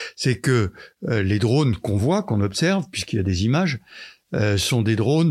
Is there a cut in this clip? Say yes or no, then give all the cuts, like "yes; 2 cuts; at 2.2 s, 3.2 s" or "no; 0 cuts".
no; 0 cuts